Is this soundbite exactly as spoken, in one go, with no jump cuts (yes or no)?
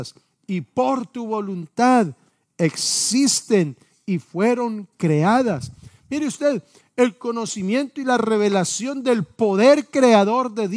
yes